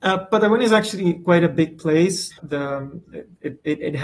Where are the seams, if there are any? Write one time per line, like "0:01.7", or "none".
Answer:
0:02.3